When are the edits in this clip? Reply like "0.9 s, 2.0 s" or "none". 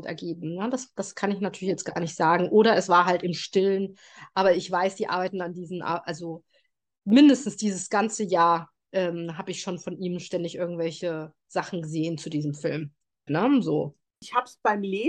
13.3 s